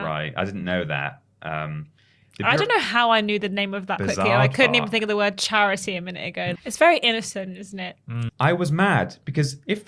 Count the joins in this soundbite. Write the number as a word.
three